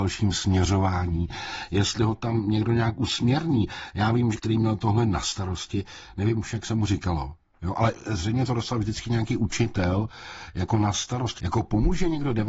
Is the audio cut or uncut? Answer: cut